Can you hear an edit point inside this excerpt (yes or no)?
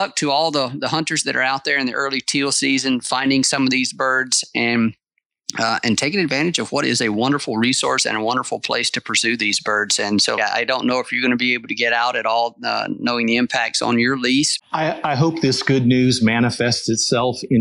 yes